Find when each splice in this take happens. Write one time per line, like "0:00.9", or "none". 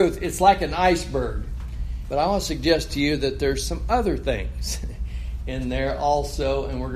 0:02.0